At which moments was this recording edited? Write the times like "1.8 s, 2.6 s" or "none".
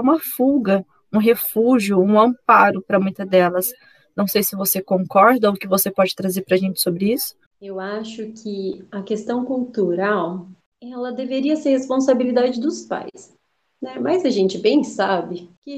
none

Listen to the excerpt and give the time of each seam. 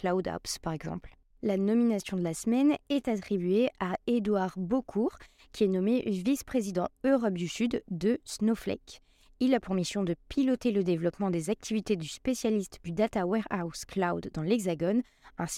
1.3 s

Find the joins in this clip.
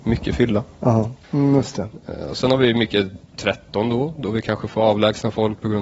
1.2 s

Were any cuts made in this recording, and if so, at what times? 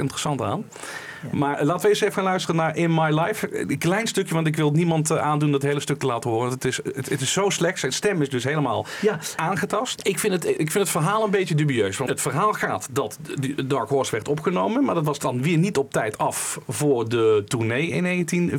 9.9 s, 12.1 s

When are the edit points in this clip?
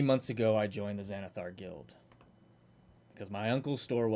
none

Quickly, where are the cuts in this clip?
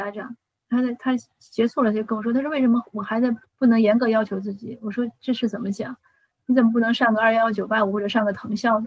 3.4 s, 6.3 s

